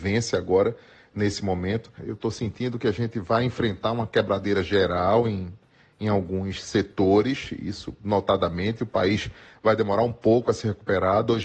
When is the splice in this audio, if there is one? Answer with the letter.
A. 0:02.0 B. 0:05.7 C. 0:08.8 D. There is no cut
A